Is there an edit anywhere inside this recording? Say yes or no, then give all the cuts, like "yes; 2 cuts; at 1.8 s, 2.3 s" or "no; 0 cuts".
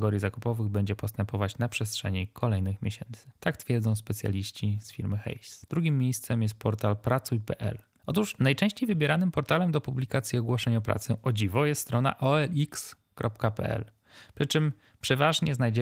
no; 0 cuts